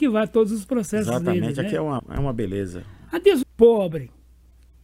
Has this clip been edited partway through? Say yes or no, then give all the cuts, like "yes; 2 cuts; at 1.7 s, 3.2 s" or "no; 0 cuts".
yes; 2 cuts; at 2.0 s, 3.4 s